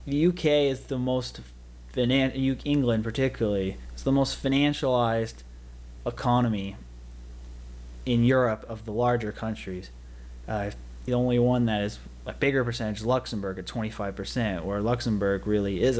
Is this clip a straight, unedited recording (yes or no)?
no